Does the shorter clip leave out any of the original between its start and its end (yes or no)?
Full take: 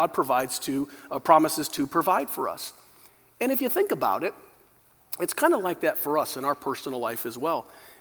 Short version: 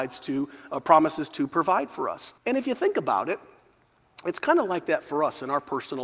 yes